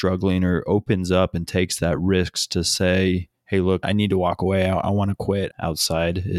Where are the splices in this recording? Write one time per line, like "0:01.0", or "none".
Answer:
0:03.8
0:05.5